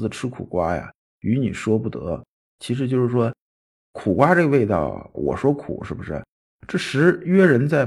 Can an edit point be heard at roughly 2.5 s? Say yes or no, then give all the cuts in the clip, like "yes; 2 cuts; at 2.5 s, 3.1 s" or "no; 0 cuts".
yes; 3 cuts; at 2.5 s, 5.1 s, 6.5 s